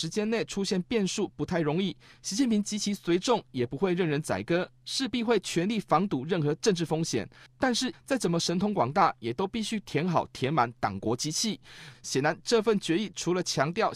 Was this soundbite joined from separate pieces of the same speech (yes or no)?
yes